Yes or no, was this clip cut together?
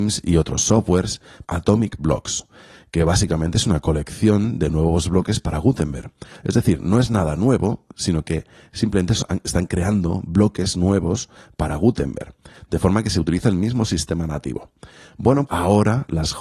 yes